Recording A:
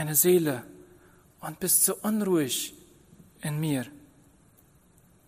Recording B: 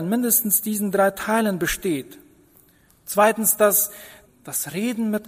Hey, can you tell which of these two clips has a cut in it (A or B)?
B